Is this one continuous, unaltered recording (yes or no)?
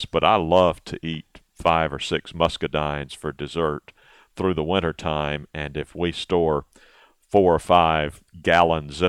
yes